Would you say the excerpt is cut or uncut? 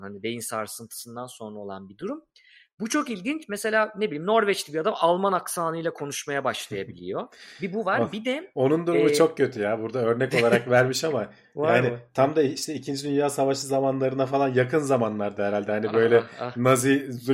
uncut